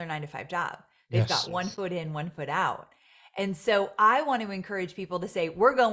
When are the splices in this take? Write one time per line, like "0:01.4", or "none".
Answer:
none